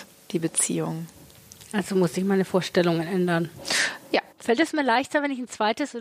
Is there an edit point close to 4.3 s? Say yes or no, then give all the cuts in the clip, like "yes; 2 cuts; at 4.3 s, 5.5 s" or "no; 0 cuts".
yes; 1 cut; at 4.3 s